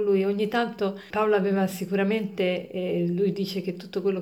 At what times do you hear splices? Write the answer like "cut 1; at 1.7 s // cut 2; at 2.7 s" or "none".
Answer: cut 1; at 1.1 s